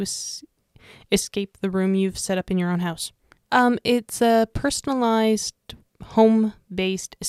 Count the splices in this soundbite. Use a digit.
1